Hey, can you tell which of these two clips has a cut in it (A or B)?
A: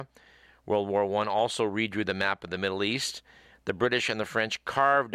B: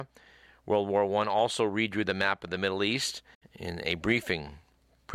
B